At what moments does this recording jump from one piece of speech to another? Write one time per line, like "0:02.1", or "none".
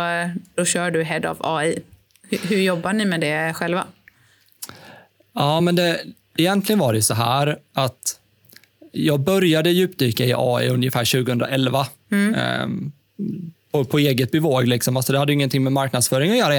none